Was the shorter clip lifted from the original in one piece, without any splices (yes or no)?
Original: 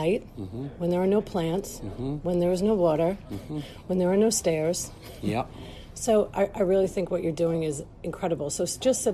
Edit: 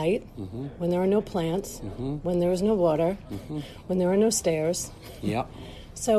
yes